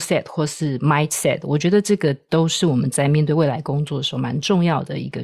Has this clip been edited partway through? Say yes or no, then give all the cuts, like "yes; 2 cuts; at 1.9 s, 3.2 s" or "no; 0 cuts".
no; 0 cuts